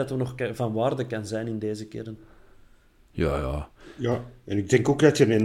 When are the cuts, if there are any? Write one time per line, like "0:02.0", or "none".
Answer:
none